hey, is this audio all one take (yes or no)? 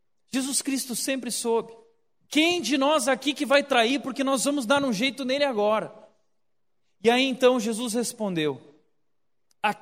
no